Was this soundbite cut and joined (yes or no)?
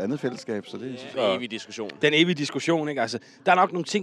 yes